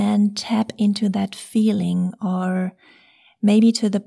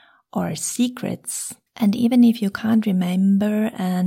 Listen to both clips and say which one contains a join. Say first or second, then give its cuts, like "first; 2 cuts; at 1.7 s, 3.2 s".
second; 1 cut; at 1.7 s